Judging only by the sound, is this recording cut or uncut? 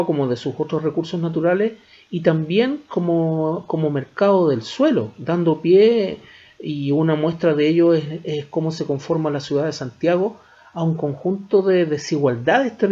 uncut